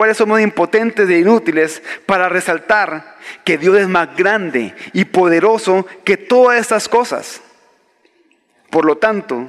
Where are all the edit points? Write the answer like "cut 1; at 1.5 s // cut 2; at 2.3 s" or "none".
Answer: none